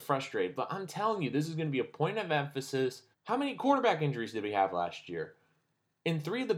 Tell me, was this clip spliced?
yes; 1 cut; at 3.1 s

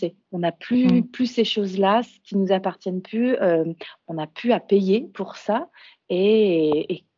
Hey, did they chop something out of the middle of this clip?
no; 0 cuts

